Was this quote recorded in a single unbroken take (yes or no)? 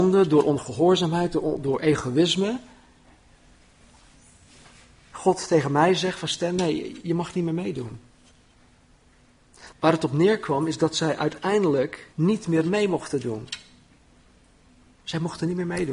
no